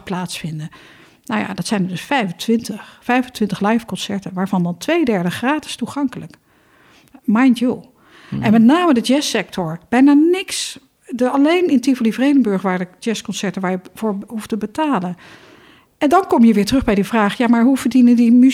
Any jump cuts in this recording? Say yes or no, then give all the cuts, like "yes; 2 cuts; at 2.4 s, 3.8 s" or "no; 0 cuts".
no; 0 cuts